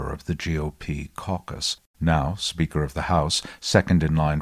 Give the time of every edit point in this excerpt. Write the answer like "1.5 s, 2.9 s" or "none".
1.9 s